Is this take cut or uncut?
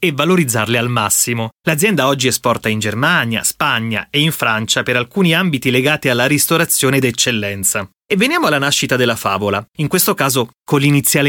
uncut